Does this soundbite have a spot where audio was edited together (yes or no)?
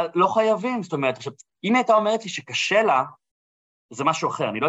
no